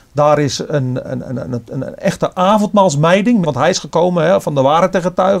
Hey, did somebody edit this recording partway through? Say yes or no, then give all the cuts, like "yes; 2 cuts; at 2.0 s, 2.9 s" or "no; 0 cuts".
yes; 2 cuts; at 1.0 s, 3.4 s